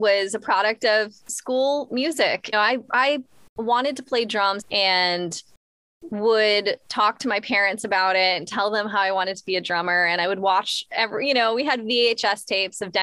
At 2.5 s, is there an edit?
yes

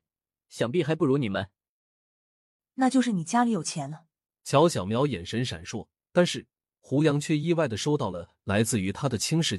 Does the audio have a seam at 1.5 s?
no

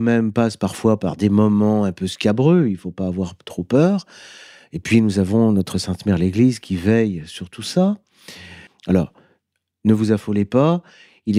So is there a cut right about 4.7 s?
no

